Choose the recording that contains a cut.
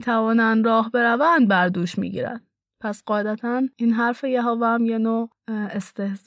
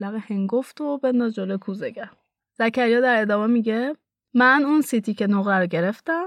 first; 1 cut; at 2.6 s

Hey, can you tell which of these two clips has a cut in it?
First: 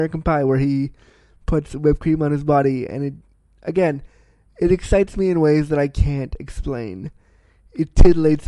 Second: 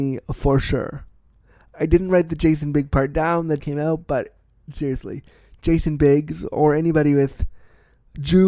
second; 1 cut; at 3.6 s

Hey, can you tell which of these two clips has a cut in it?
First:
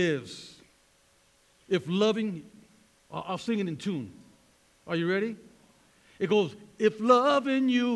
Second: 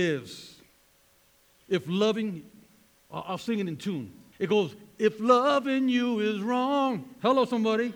second; 1 cut; at 4.3 s

